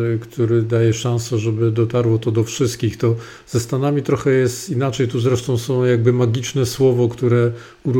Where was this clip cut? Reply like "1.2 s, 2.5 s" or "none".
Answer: none

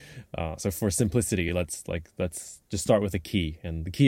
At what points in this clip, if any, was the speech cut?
none

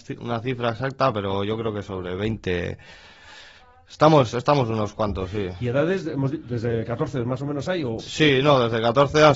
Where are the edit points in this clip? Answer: none

